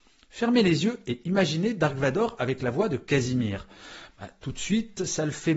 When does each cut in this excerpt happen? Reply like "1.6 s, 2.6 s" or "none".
none